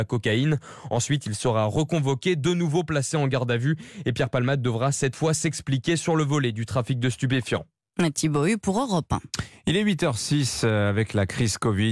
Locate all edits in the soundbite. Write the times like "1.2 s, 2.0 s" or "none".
none